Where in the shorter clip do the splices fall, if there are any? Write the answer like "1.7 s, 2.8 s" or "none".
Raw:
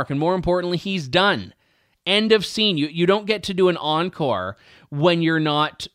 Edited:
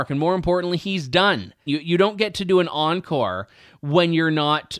1.7 s